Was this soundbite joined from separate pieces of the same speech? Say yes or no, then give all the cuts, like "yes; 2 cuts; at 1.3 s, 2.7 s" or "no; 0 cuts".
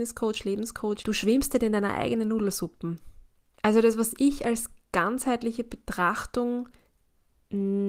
yes; 1 cut; at 1.0 s